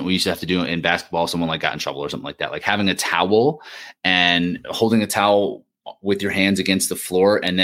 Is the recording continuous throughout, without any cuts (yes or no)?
yes